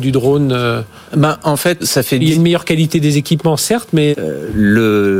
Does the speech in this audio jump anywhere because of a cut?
yes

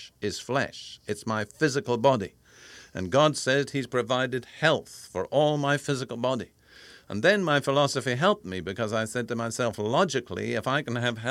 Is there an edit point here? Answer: no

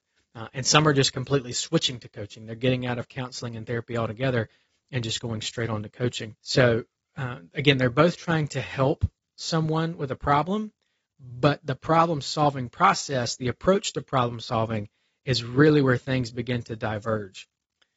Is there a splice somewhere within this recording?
yes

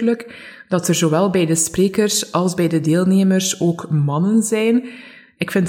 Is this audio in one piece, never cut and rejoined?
yes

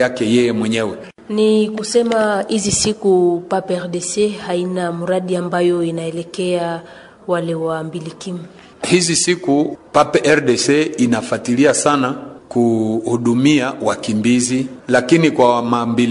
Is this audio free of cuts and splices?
yes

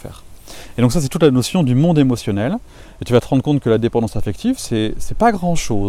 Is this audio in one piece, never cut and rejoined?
yes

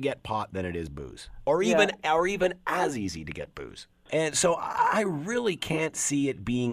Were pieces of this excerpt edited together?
yes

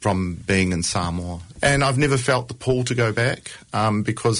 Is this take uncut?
no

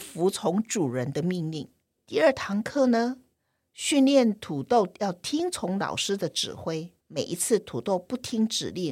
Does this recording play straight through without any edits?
no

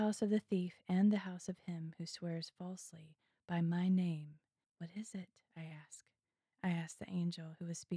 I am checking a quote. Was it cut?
yes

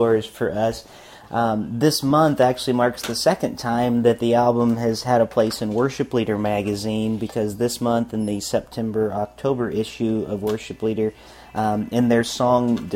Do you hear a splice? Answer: yes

